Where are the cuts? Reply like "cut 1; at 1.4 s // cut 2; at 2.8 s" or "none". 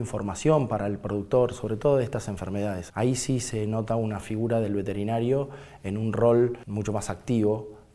cut 1; at 2.9 s